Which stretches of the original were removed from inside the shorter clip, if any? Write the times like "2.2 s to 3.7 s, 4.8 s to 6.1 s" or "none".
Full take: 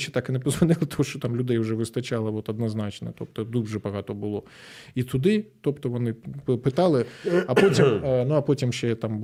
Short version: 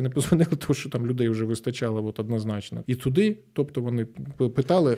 3.1 s to 4.9 s